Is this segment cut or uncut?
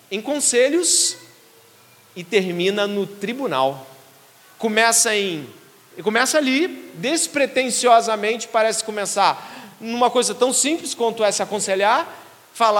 cut